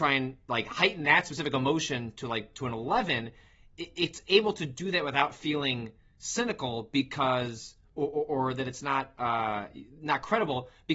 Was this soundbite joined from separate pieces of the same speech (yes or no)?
no